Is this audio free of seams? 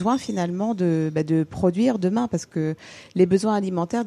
yes; 0 cuts

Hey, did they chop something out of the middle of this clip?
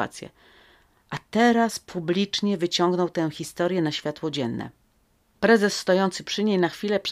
yes; 1 cut; at 5.4 s

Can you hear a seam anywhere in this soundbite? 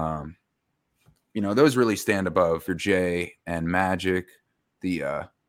yes; 1 cut; at 2.7 s

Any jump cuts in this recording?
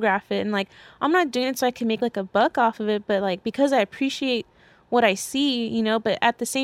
no; 0 cuts

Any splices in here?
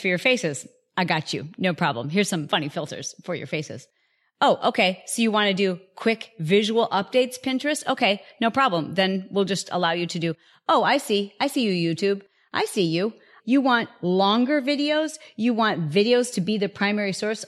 yes; 1 cut; at 13.4 s

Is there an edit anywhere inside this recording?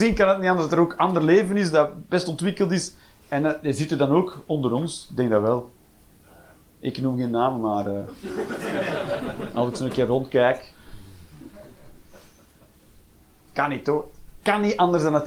no; 0 cuts

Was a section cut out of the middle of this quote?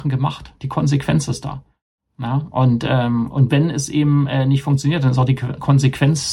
no; 0 cuts

